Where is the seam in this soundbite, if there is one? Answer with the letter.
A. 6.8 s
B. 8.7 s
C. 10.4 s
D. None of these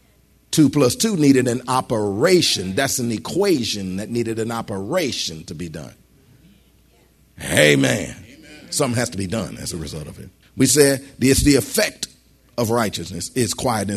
C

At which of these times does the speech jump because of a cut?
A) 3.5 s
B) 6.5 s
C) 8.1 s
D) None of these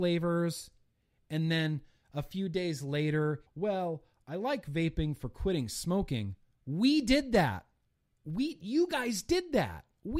A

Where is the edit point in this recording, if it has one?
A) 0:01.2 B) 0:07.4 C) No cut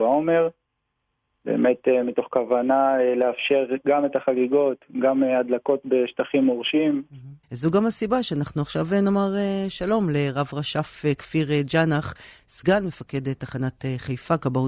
B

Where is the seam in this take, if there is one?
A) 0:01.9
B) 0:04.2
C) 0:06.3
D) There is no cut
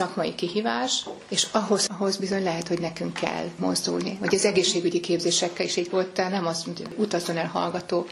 A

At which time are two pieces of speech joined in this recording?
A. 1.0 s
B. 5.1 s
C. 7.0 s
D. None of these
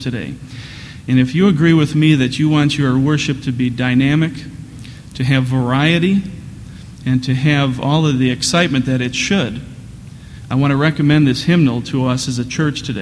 D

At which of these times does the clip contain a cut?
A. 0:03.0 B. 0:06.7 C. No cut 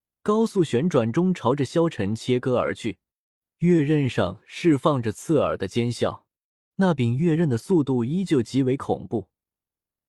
B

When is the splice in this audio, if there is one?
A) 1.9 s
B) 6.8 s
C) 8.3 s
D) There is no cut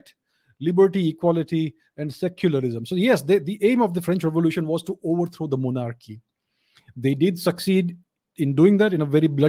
A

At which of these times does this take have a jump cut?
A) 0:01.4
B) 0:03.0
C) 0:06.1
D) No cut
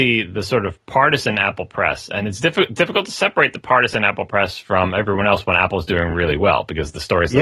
D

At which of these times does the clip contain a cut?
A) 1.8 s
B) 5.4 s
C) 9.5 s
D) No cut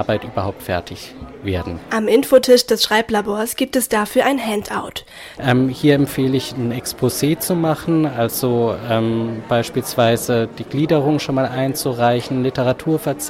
B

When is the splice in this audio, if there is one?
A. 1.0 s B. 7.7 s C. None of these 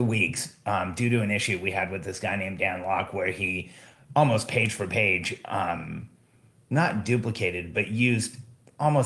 C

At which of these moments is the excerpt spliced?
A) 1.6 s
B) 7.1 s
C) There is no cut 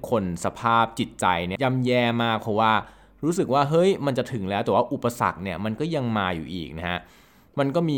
A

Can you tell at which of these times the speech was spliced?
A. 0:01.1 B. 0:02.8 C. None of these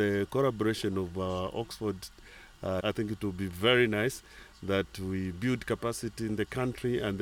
B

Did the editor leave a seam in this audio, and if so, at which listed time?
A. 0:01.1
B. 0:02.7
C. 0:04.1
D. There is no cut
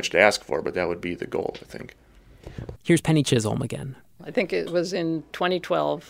B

